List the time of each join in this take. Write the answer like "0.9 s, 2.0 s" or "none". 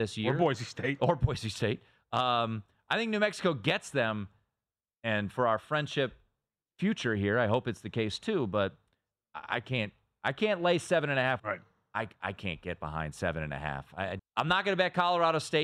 11.4 s, 14.2 s